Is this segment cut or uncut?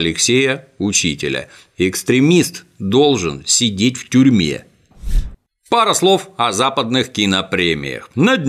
uncut